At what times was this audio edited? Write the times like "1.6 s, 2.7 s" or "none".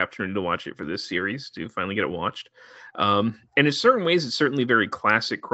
none

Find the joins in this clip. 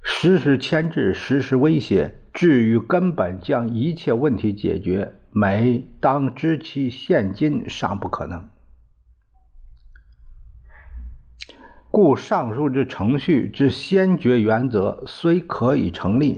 none

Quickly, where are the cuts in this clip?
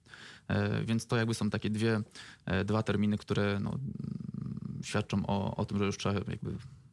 none

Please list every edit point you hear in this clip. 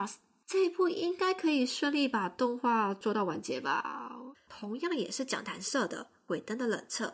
4.3 s

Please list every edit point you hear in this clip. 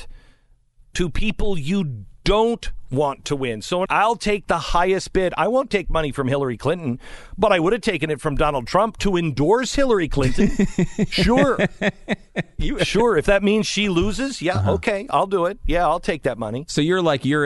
3.8 s

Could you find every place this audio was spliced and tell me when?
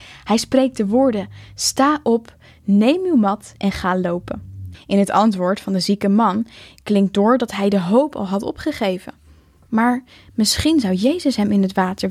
4.7 s

